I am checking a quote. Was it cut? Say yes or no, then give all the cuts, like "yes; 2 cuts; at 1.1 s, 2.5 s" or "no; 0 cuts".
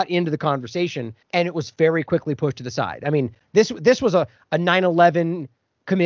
yes; 1 cut; at 1.2 s